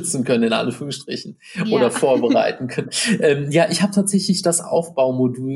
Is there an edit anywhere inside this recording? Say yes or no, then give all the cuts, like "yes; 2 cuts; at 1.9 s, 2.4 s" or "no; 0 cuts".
no; 0 cuts